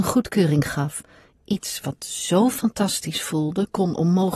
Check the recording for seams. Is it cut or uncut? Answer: uncut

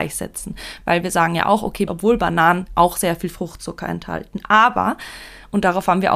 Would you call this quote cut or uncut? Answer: cut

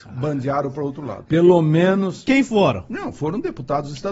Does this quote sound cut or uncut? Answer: cut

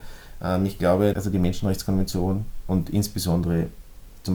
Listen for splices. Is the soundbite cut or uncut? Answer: cut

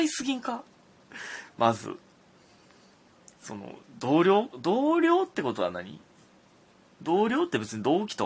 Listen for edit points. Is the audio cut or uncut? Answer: uncut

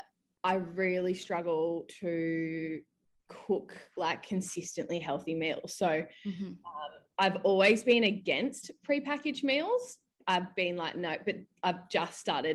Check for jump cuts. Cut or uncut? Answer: uncut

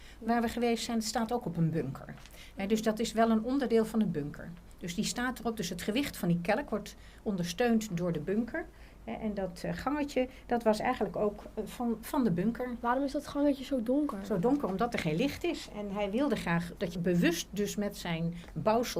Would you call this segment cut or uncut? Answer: cut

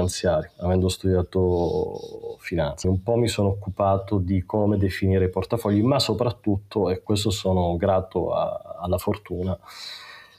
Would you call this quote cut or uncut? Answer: cut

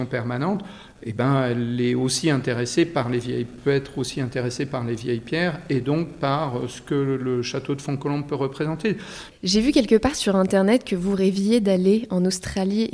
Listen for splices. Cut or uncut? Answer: cut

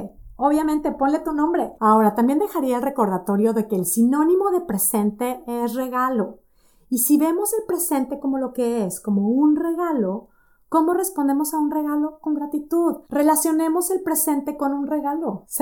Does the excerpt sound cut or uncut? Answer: cut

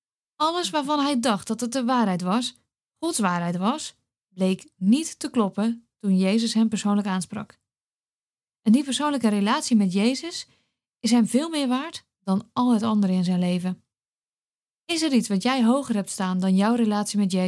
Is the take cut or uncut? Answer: uncut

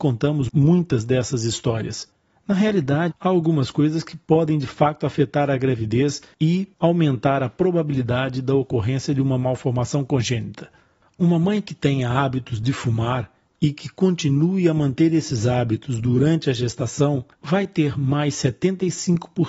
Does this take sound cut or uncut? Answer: cut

